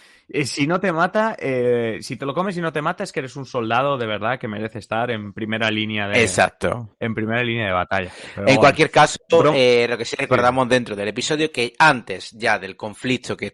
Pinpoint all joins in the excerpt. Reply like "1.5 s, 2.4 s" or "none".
none